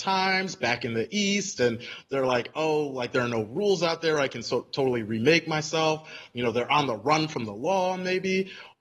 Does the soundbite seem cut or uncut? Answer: uncut